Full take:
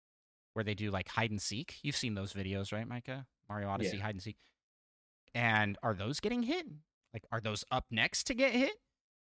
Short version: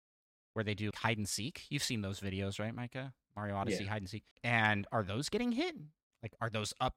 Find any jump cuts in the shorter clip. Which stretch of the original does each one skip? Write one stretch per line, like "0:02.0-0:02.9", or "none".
0:00.9-0:01.0
0:04.4-0:05.2